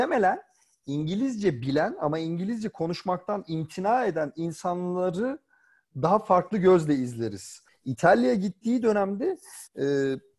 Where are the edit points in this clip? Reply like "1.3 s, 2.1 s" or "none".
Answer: 7.7 s